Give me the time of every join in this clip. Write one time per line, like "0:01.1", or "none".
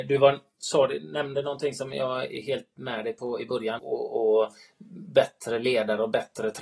0:03.8